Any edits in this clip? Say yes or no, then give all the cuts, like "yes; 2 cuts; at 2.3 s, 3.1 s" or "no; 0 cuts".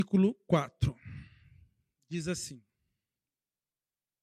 no; 0 cuts